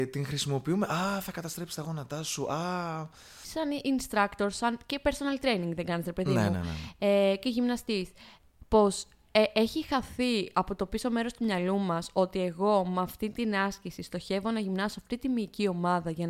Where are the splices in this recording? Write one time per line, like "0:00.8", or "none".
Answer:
0:03.4